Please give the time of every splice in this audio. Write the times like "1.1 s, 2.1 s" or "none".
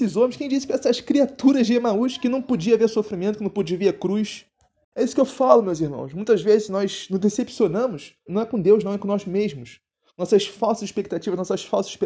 8.3 s